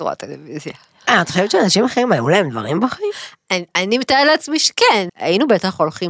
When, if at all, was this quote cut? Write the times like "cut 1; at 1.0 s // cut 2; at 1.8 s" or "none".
cut 1; at 3.7 s // cut 2; at 5.1 s

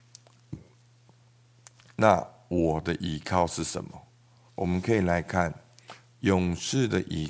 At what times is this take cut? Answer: cut 1; at 4.5 s

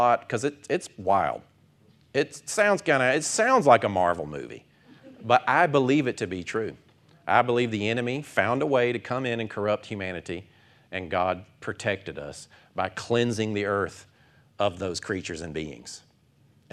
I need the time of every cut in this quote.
none

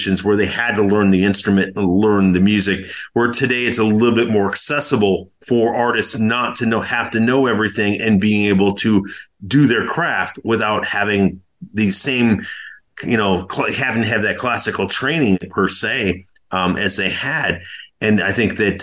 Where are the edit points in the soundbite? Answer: cut 1; at 5.4 s

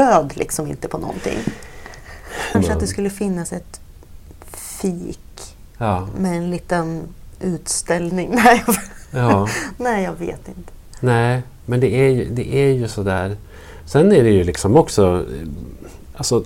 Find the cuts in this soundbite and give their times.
cut 1; at 2.5 s

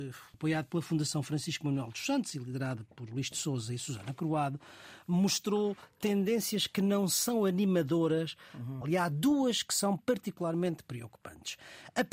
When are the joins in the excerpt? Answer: cut 1; at 2.9 s // cut 2; at 8.8 s // cut 3; at 10.0 s

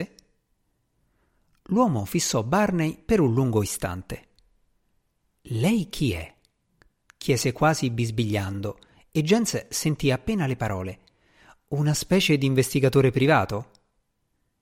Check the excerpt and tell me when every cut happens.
none

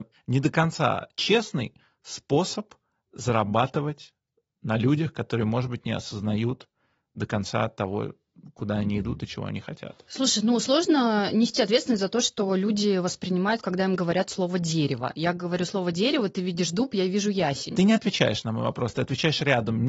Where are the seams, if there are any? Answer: none

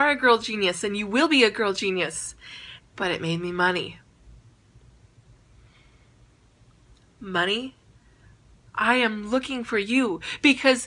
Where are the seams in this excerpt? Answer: cut 1; at 2.9 s // cut 2; at 8.7 s

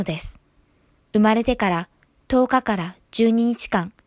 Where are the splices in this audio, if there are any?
cut 1; at 1.0 s

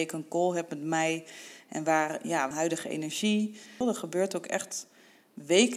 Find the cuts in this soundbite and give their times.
cut 1; at 2.5 s // cut 2; at 3.8 s

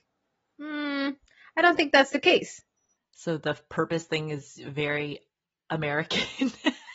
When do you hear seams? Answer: cut 1; at 3.0 s

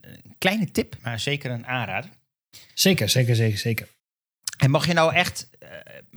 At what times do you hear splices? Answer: cut 1; at 1.0 s

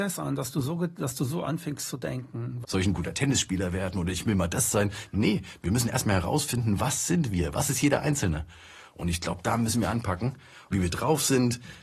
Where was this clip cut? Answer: cut 1; at 2.6 s // cut 2; at 10.7 s

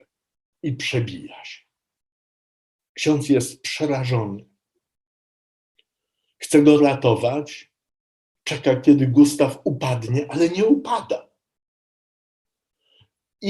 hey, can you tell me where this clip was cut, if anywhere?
none

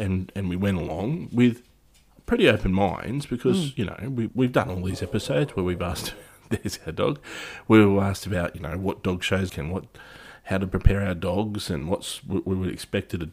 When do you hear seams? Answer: cut 1; at 4.3 s // cut 2; at 9.5 s

